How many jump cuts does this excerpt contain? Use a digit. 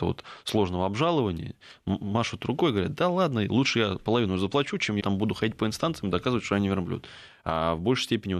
2